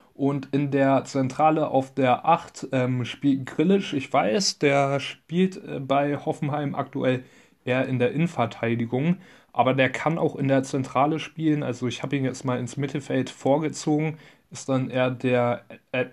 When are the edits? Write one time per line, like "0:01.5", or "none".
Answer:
none